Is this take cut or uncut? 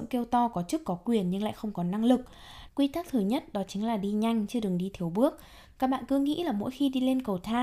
cut